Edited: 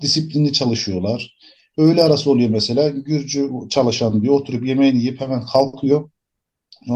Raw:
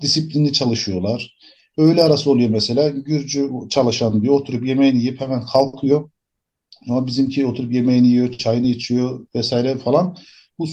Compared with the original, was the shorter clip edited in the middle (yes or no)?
no